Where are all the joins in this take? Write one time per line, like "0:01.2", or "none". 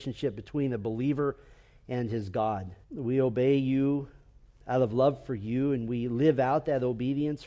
0:02.8